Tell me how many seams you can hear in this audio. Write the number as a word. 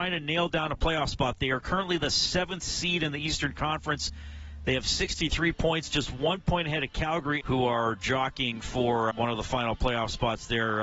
two